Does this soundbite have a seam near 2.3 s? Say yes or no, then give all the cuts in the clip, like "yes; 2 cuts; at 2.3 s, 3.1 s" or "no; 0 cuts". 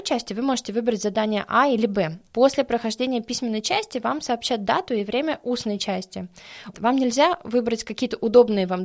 yes; 2 cuts; at 2.3 s, 6.7 s